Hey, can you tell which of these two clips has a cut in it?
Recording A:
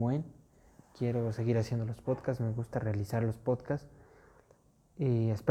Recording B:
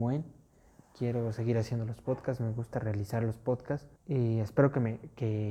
B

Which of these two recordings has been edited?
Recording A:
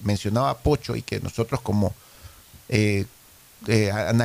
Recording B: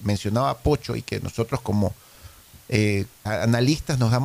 B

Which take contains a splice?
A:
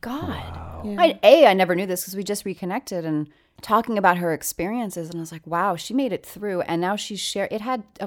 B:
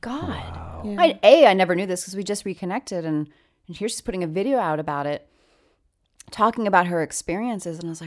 A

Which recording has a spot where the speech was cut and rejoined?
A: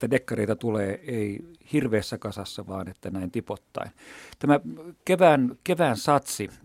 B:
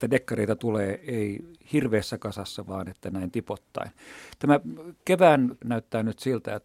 B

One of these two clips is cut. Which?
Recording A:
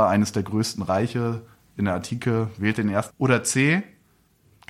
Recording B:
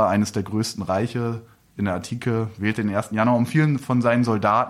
A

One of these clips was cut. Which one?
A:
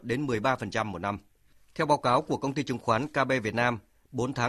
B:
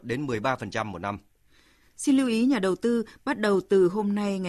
A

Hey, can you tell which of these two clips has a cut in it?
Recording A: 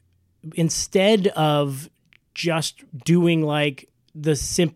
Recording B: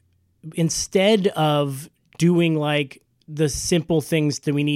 B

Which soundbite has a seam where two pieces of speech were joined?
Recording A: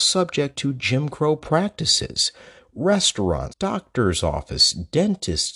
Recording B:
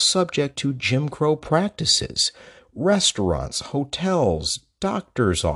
A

